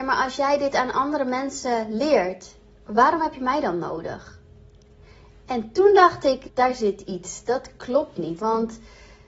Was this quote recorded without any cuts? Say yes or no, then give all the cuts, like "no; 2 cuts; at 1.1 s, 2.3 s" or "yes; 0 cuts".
no; 2 cuts; at 6.5 s, 8.4 s